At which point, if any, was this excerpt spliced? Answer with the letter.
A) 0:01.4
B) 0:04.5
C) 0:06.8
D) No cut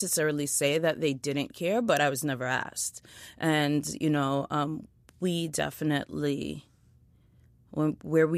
D